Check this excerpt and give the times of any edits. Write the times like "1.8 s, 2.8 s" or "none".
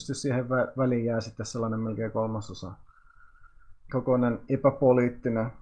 3.9 s